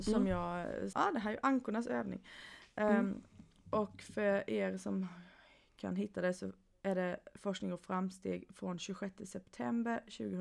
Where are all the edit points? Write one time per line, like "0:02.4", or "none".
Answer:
0:00.9